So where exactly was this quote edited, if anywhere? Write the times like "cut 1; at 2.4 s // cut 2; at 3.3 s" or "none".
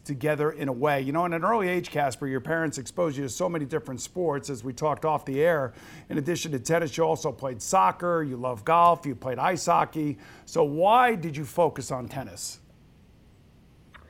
none

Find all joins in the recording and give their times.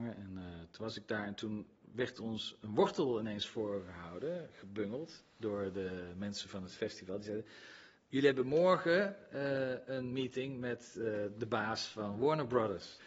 none

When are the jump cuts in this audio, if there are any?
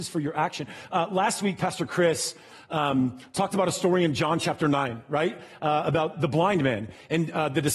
cut 1; at 6.1 s

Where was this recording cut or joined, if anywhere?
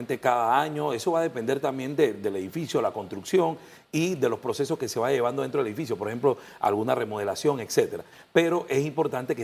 none

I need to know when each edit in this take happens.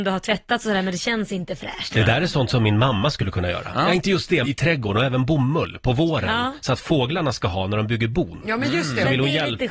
cut 1; at 4.4 s

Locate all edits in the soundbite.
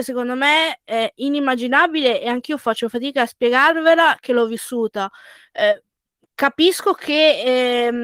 none

